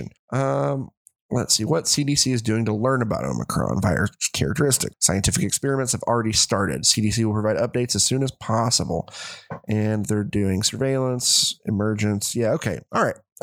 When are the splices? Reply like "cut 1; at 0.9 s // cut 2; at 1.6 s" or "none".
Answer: cut 1; at 4.9 s